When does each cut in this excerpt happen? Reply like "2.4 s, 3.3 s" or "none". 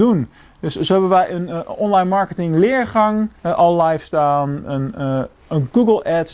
3.4 s